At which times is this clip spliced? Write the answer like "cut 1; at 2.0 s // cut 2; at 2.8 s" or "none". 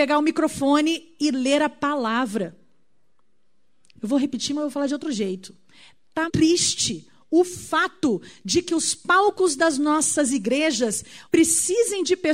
cut 1; at 6.3 s // cut 2; at 11.3 s

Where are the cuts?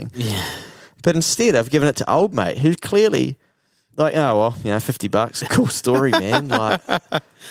cut 1; at 5.4 s

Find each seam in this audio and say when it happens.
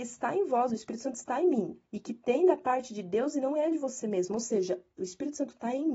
cut 1; at 1.9 s

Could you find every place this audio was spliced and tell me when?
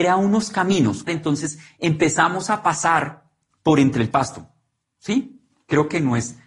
cut 1; at 1.1 s

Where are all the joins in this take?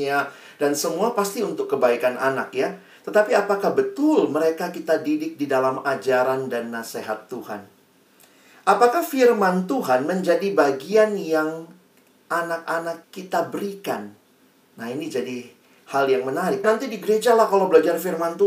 cut 1; at 13.0 s // cut 2; at 16.6 s

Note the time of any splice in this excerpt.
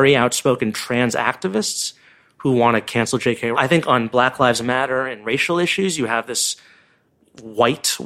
cut 1; at 3.5 s

